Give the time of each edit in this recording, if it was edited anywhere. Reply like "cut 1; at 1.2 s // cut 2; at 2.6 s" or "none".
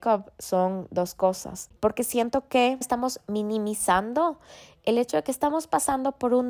cut 1; at 1.8 s // cut 2; at 2.8 s